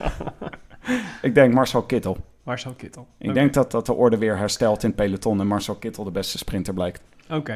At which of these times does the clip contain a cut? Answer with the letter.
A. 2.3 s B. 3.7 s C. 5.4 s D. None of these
B